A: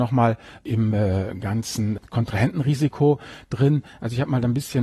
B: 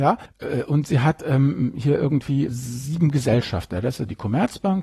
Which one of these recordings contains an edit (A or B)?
B